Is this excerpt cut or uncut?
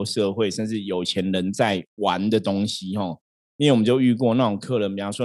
uncut